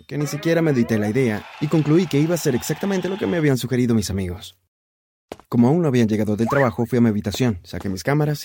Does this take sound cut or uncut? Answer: cut